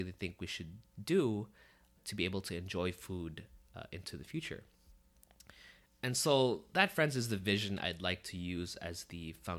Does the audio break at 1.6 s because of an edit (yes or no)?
no